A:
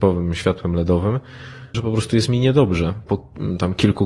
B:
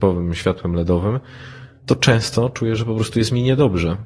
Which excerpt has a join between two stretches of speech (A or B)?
A